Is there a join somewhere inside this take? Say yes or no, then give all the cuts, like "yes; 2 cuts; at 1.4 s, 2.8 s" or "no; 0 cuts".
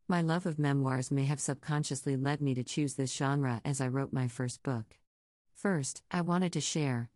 no; 0 cuts